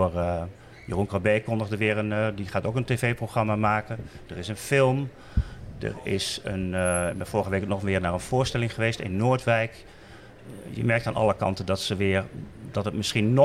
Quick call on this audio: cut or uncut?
uncut